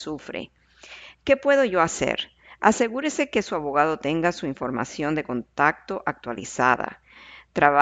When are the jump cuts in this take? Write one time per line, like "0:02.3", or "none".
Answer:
none